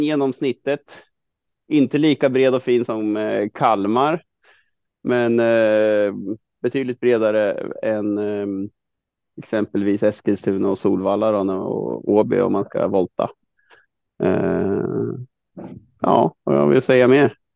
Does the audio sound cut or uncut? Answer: cut